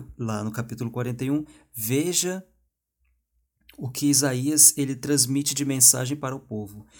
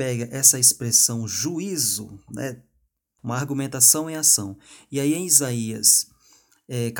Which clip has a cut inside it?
second; 1 cut; at 3.2 s

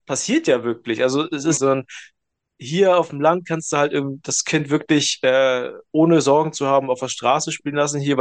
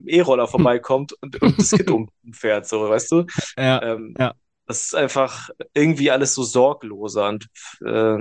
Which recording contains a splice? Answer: first; 1 cut; at 1.6 s

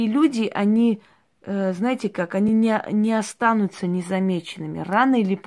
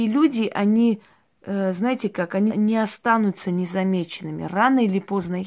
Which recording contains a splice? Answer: second; 1 cut; at 2.5 s

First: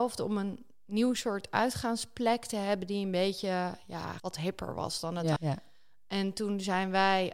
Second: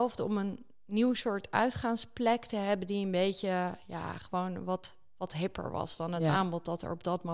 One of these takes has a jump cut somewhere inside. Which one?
first; 2 cuts; at 4.2 s, 5.4 s

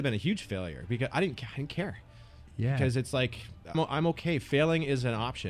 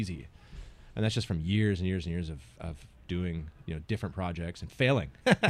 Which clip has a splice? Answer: first; 1 cut; at 3.7 s

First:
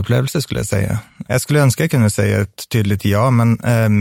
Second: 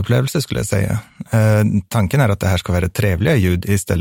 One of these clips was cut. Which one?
first; 1 cut; at 1.2 s

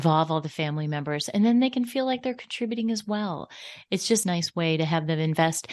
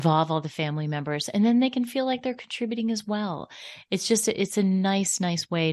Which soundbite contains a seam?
first; 1 cut; at 4.2 s

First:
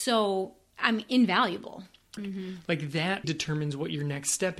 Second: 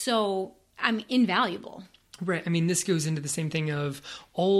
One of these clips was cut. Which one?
first; 2 cuts; at 2.2 s, 3.2 s

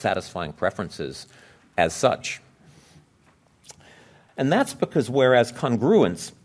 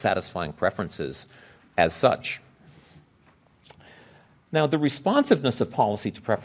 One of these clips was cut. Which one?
first; 1 cut; at 4.3 s

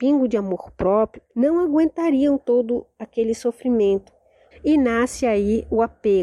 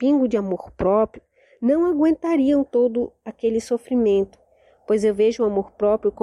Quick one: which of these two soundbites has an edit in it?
first; 2 cuts; at 1.3 s, 4.5 s

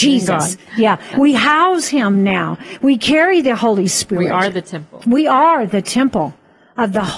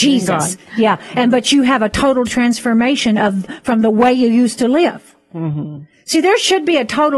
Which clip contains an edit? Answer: first; 1 cut; at 1.1 s

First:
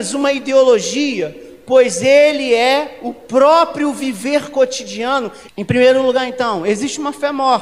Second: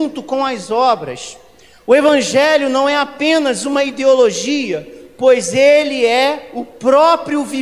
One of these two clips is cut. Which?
first; 1 cut; at 5.5 s

